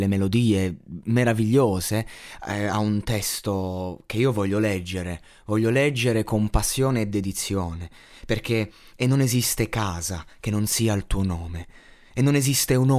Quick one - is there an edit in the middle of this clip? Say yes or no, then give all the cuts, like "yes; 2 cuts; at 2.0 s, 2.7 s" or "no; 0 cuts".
no; 0 cuts